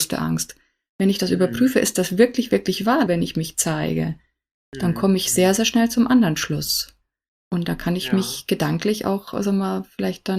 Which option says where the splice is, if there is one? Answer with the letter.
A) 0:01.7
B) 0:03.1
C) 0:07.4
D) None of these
B